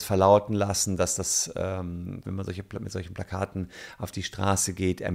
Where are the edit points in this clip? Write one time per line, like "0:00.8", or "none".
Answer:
0:02.2

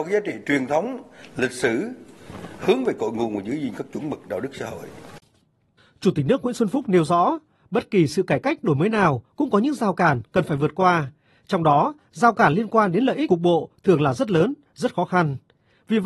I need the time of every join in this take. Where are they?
none

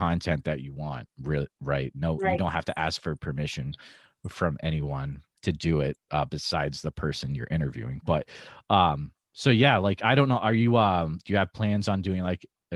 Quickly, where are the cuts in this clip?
none

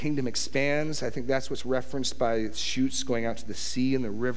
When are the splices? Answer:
none

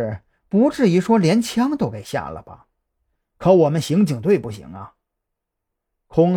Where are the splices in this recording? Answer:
0:03.2

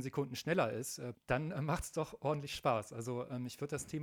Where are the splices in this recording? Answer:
0:01.1

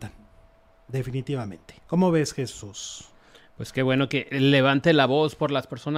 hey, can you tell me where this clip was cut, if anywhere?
0:01.8

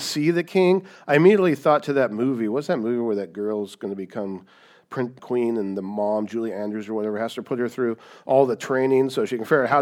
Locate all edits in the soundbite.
0:05.2

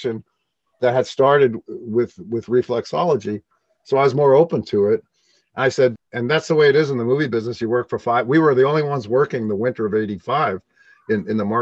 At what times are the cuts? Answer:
0:05.9

